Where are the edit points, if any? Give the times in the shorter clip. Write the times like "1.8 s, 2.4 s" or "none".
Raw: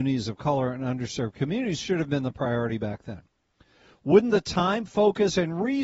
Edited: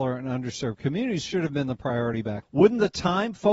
2.4 s